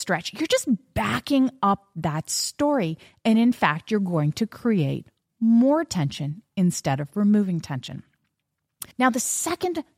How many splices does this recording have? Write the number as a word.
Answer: one